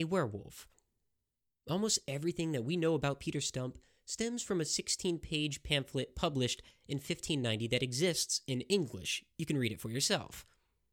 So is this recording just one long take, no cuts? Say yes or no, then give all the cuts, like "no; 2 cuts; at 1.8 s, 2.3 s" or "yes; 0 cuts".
yes; 0 cuts